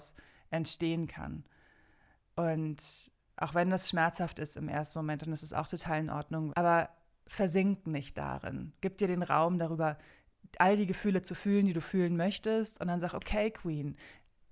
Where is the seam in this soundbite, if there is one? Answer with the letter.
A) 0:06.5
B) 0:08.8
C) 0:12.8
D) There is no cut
A